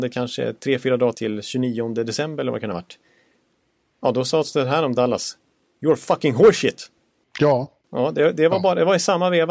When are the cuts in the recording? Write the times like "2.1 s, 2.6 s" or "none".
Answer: 1.1 s